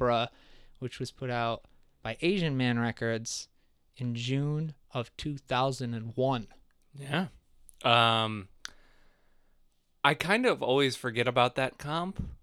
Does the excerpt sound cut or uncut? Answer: uncut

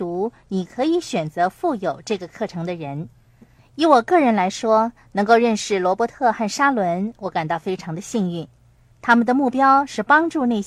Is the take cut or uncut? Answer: cut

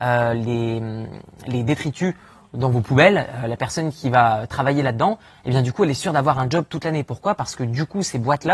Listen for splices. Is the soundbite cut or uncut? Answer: uncut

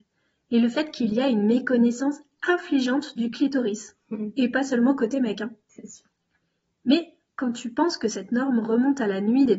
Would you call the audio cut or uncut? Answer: uncut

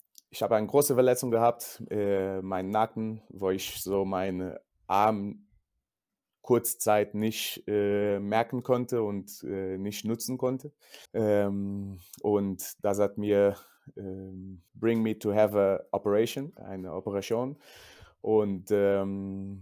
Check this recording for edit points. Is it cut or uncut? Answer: cut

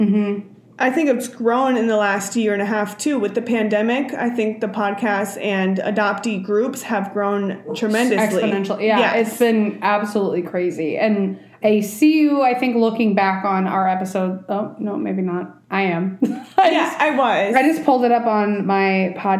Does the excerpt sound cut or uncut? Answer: uncut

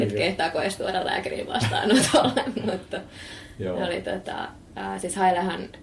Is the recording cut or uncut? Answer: uncut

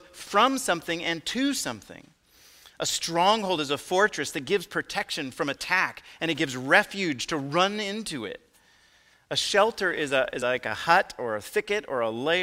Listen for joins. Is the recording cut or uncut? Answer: uncut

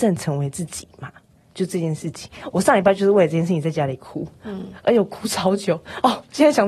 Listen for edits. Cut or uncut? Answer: uncut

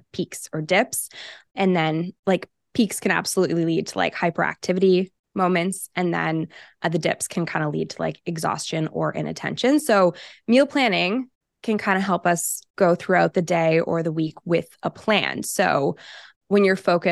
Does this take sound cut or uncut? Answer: uncut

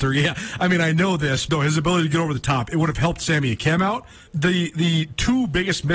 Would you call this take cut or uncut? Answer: cut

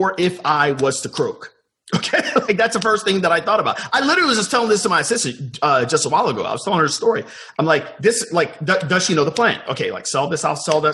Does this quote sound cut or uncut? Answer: uncut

